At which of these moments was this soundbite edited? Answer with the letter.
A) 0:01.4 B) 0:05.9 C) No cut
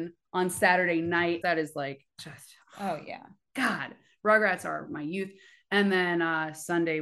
A